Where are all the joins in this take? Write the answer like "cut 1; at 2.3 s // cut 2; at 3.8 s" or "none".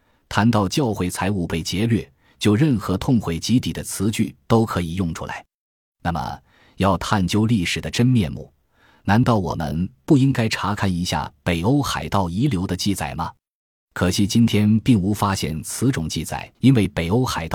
cut 1; at 16.5 s